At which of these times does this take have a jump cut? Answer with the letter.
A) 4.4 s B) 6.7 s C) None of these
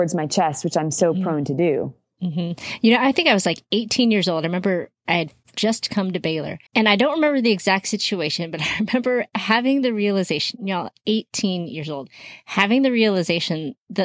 B